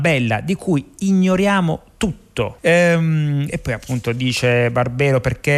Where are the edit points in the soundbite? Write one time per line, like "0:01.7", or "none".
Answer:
0:02.6